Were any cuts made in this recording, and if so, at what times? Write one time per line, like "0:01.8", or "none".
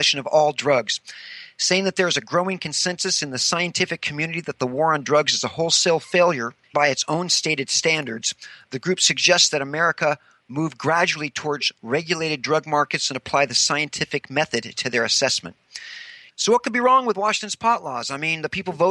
0:06.7
0:16.3